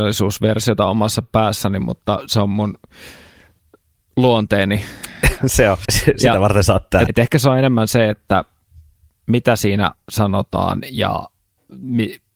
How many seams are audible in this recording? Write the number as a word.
two